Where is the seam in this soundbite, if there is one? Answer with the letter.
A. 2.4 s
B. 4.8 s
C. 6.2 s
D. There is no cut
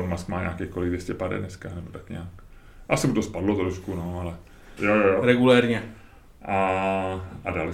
B